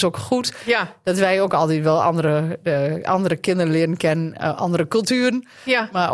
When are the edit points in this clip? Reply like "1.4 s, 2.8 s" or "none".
none